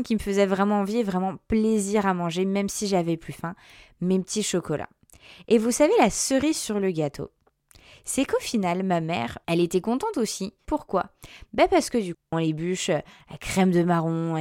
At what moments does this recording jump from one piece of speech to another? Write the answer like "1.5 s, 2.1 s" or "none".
10.7 s, 12.3 s